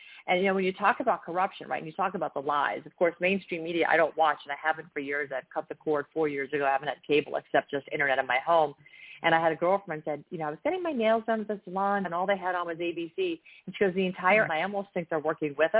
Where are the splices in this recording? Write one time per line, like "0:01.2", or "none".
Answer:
0:12.0
0:14.5